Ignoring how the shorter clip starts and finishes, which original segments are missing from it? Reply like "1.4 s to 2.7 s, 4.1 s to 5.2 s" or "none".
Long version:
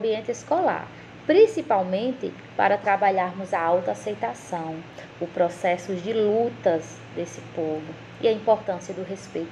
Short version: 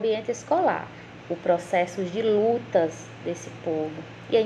1.2 s to 5.1 s

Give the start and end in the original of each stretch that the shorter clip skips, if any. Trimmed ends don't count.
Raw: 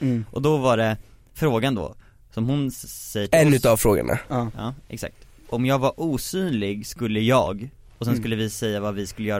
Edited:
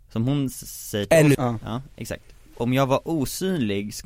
3.6 s to 4.3 s

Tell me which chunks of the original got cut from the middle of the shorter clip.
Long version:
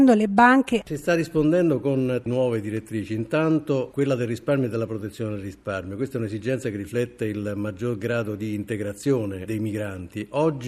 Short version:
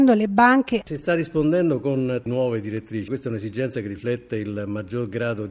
3.1 s to 6.0 s

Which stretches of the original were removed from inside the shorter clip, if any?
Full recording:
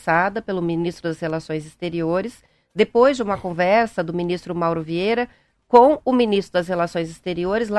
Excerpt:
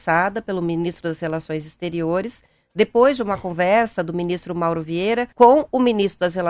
5.3 s to 5.6 s

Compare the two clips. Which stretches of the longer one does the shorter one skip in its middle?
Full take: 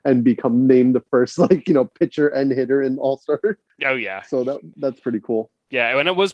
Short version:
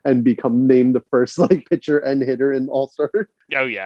1.6 s to 1.9 s

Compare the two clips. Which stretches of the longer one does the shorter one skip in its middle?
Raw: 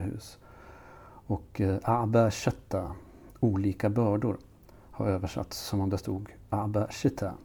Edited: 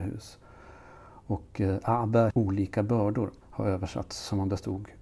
2.3 s to 3.4 s, 4.5 s to 4.8 s

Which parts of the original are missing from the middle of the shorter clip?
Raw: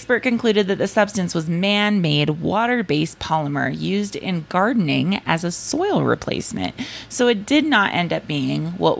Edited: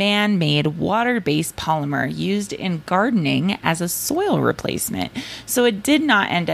none

